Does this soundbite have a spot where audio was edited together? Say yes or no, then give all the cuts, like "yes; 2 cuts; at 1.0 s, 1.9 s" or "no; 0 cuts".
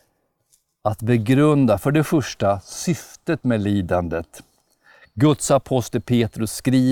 no; 0 cuts